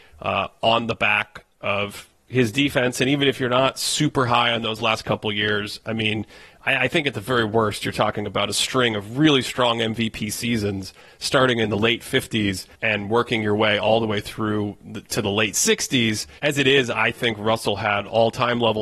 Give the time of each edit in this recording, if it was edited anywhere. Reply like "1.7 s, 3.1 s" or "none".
12.7 s, 16.4 s